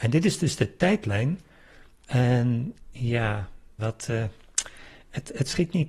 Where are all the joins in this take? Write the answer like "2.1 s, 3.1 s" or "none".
3.8 s